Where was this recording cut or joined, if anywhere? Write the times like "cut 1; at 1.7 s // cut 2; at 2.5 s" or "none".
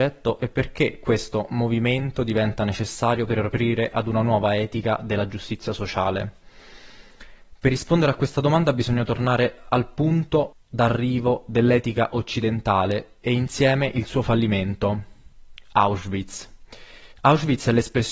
cut 1; at 17.1 s